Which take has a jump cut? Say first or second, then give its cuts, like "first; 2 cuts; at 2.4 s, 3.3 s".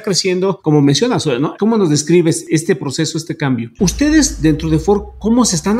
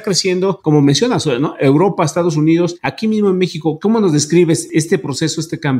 first; 2 cuts; at 1.6 s, 3.8 s